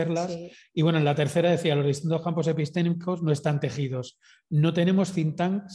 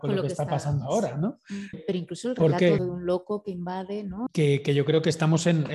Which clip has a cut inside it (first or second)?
second